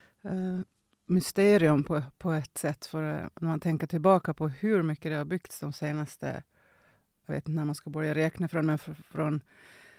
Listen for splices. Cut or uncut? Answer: uncut